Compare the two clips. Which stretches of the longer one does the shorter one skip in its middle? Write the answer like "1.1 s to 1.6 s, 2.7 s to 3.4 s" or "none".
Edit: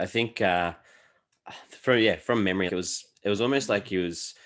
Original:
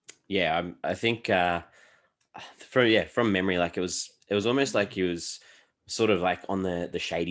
3.5 s to 3.7 s